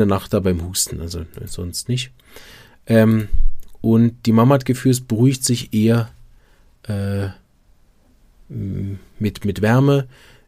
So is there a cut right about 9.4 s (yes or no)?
no